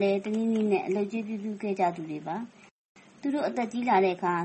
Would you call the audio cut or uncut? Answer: uncut